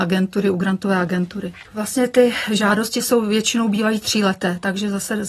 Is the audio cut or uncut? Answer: cut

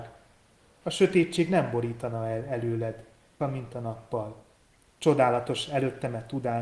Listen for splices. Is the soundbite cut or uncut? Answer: cut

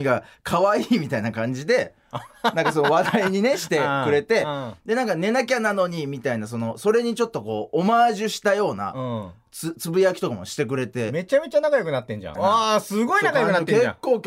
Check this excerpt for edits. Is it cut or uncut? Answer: cut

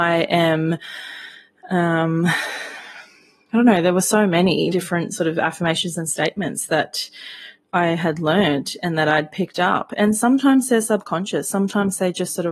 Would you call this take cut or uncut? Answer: cut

